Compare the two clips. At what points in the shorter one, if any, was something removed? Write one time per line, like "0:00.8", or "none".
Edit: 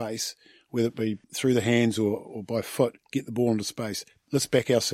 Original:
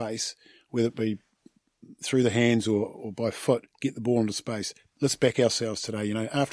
0:01.2